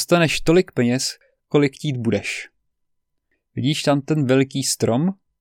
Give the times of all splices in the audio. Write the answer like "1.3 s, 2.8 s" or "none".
3.3 s